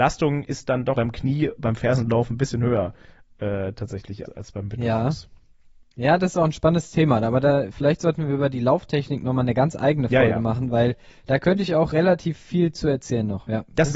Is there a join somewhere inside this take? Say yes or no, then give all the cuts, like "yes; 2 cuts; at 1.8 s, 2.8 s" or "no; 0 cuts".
yes; 2 cuts; at 1.0 s, 4.3 s